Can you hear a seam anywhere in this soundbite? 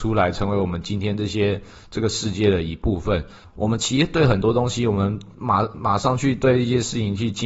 yes; 1 cut; at 3.4 s

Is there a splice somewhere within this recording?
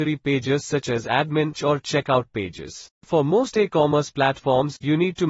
yes; 2 cuts; at 1.5 s, 2.9 s

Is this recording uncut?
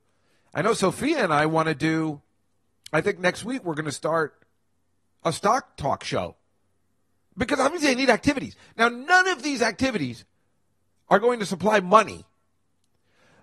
yes; 0 cuts

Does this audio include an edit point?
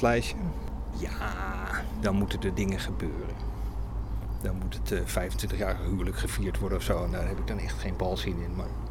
yes; 1 cut; at 0.9 s

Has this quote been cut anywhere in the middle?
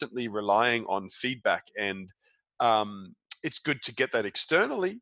no; 0 cuts

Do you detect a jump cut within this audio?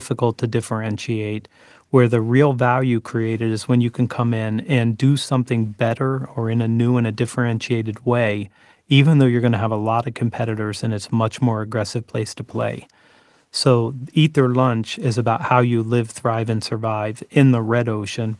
no; 0 cuts

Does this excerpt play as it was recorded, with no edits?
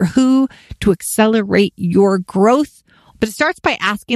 no; 1 cut; at 3.1 s

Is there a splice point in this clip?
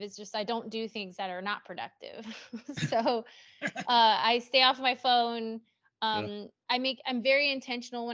no; 0 cuts

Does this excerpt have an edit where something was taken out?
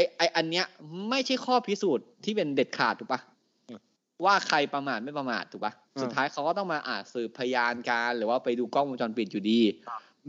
no; 0 cuts

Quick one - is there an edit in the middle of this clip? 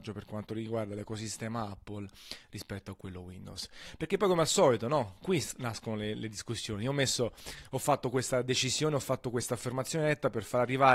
no; 0 cuts

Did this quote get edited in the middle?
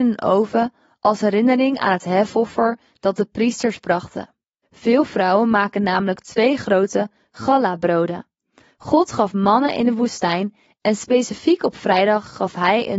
yes; 1 cut; at 4.6 s

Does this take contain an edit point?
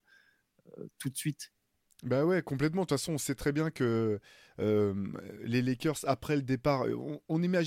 no; 0 cuts

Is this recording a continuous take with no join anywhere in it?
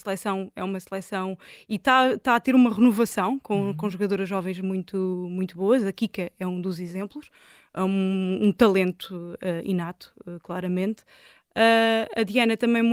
yes; 0 cuts

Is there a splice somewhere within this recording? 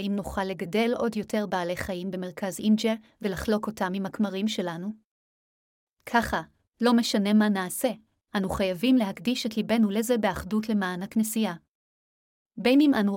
no; 0 cuts

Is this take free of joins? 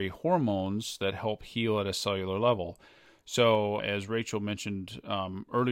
no; 1 cut; at 3.8 s

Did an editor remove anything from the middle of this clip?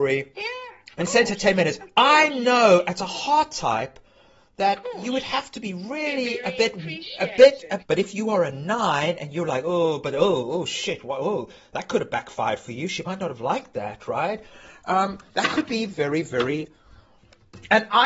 yes; 1 cut; at 7.8 s

